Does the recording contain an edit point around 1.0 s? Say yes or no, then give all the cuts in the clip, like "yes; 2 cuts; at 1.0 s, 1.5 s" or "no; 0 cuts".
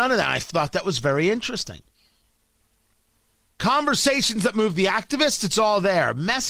no; 1 cut; at 3.5 s